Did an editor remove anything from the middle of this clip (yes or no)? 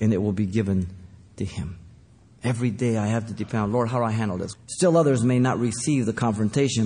yes